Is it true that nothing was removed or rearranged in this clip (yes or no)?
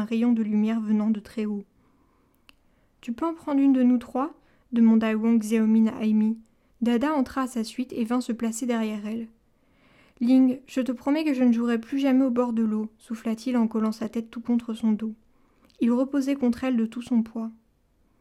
no